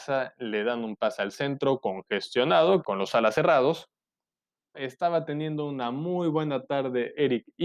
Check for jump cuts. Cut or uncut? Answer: cut